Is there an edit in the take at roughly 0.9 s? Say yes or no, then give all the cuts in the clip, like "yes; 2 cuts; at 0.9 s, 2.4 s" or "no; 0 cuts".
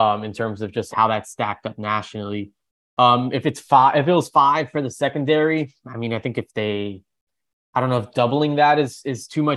yes; 1 cut; at 0.9 s